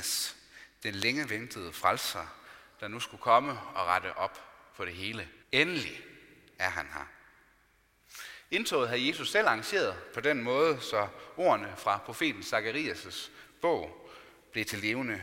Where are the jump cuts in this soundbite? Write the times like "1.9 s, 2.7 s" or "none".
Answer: 5.4 s